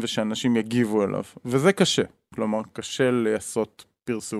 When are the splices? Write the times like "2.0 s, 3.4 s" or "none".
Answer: none